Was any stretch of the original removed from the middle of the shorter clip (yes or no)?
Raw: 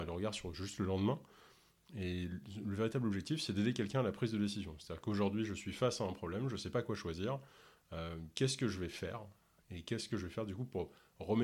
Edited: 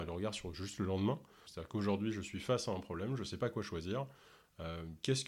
yes